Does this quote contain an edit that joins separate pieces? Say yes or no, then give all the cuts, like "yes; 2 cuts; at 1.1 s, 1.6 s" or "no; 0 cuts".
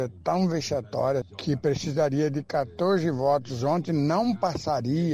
yes; 1 cut; at 1.2 s